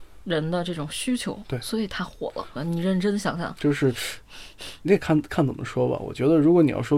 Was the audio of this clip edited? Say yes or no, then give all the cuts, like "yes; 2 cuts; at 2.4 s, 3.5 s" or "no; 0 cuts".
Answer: yes; 1 cut; at 2.6 s